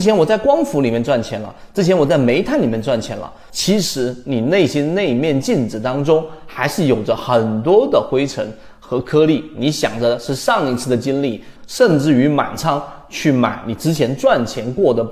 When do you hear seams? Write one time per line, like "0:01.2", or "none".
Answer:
0:03.5
0:11.6